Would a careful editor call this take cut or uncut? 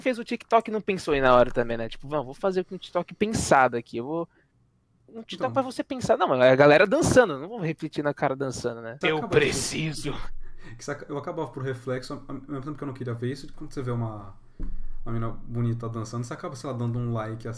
cut